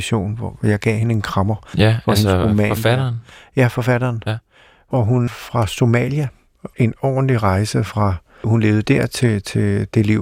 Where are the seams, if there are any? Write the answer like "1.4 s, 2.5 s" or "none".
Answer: 5.3 s, 6.7 s, 8.4 s